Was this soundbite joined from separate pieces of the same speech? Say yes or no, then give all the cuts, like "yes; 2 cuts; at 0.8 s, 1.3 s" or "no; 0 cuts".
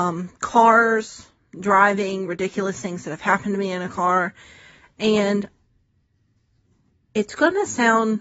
no; 0 cuts